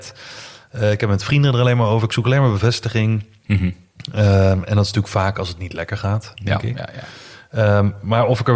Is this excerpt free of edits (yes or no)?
yes